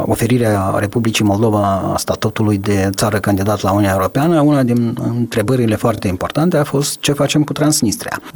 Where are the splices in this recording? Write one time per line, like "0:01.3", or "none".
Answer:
none